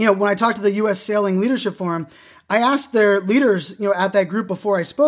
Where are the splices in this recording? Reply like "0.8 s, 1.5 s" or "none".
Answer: none